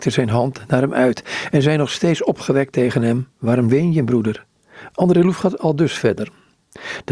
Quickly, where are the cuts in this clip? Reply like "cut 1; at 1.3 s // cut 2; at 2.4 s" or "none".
cut 1; at 3.3 s // cut 2; at 4.9 s

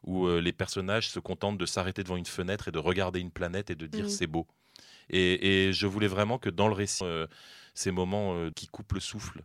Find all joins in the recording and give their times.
cut 1; at 7.0 s // cut 2; at 8.5 s

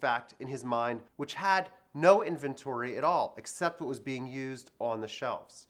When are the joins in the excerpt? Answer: cut 1; at 1.1 s

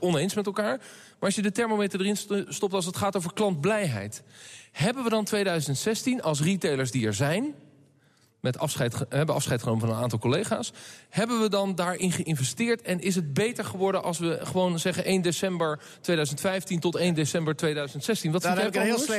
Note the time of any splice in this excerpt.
none

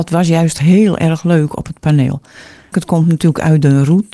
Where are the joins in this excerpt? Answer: cut 1; at 2.7 s

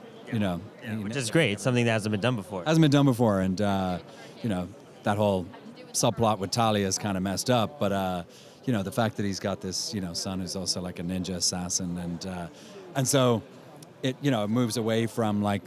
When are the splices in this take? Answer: none

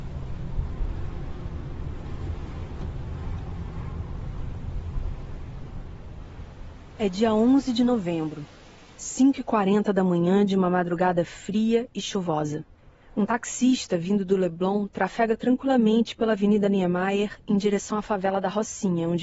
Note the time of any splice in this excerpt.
none

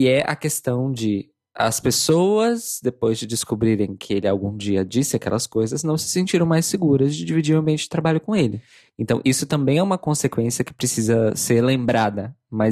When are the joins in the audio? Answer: none

